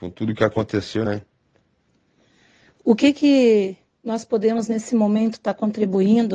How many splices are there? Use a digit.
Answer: 1